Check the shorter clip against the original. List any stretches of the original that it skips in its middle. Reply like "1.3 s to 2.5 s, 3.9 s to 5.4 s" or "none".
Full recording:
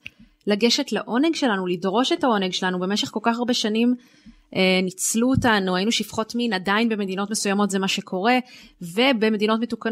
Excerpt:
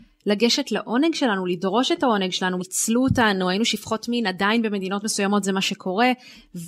2.8 s to 4.9 s